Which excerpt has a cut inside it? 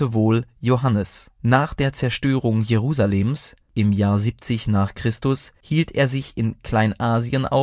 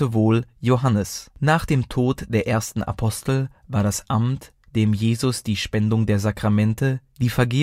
second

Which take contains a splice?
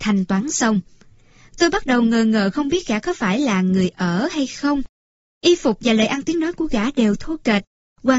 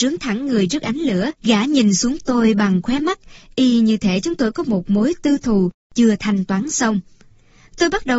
second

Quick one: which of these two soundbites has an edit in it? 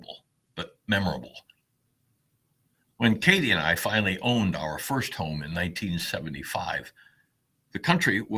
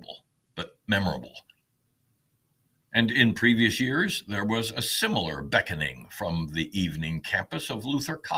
second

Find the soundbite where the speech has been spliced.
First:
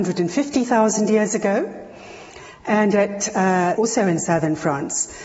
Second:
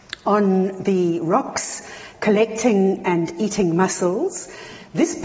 first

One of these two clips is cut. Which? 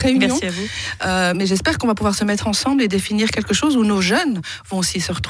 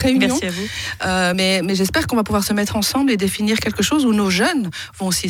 first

